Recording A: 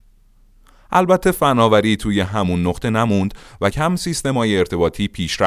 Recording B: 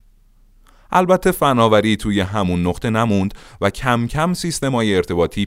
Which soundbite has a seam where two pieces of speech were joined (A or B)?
A